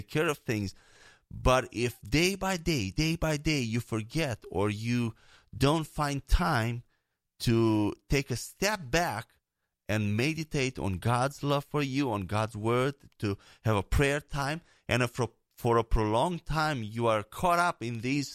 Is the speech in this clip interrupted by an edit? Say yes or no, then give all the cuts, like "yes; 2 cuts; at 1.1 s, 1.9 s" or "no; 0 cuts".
no; 0 cuts